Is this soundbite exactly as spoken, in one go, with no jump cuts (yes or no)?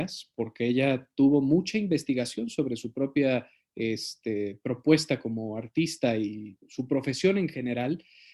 no